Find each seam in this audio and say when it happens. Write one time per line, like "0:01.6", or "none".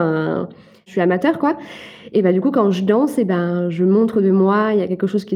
none

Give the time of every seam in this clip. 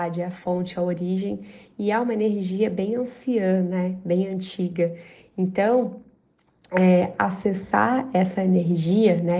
none

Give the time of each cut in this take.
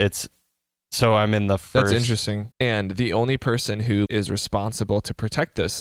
0:02.5
0:04.1

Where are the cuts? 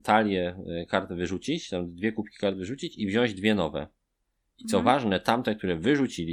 none

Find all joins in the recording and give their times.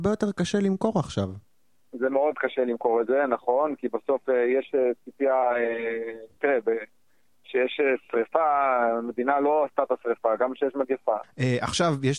0:06.4
0:11.2

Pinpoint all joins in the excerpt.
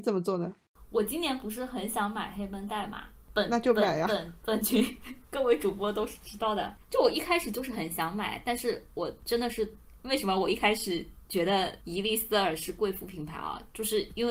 none

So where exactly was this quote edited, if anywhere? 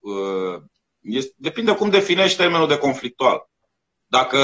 none

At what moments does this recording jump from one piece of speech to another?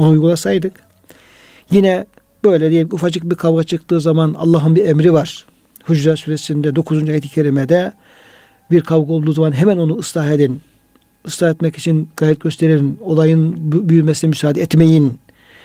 none

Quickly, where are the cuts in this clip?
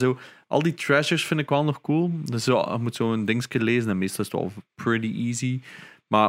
0:04.7

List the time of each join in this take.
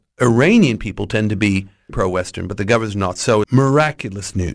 0:01.9
0:03.4

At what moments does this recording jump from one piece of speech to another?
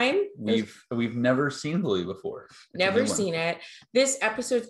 none

